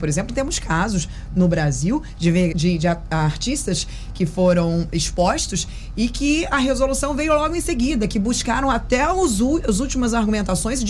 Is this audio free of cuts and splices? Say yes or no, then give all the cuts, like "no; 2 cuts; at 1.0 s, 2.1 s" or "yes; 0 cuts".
no; 1 cut; at 2.5 s